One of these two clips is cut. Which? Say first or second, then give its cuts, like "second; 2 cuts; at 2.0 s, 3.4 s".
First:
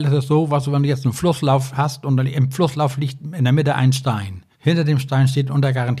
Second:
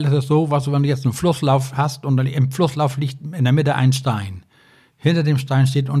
first; 1 cut; at 4.5 s